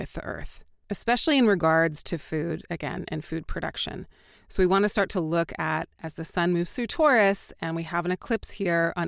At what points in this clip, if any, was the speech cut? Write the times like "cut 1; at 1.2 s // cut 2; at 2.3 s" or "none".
none